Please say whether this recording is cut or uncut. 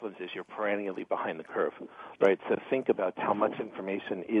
cut